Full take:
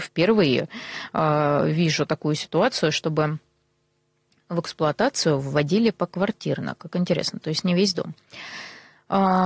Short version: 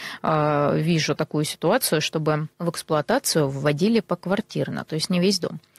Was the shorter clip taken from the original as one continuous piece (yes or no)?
no